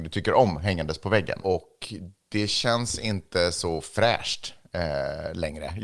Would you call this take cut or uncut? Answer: cut